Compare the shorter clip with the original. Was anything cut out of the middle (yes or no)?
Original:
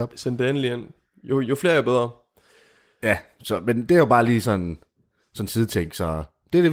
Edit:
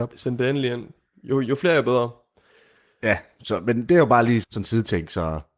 yes